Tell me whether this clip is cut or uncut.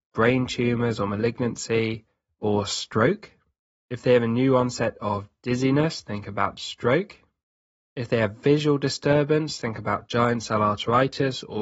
uncut